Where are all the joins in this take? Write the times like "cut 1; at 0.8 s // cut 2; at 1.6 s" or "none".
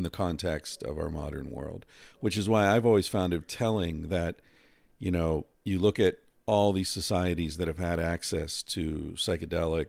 cut 1; at 3.4 s // cut 2; at 5.5 s